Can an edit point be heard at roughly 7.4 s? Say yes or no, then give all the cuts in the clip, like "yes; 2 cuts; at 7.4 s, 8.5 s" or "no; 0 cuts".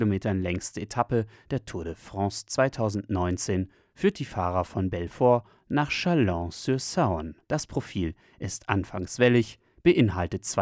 yes; 1 cut; at 7.4 s